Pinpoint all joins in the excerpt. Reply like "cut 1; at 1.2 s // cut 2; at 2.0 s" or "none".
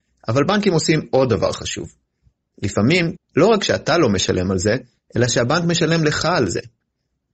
cut 1; at 3.1 s

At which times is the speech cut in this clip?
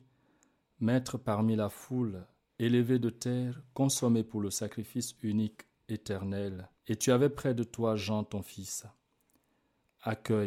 cut 1; at 2.5 s // cut 2; at 6.8 s

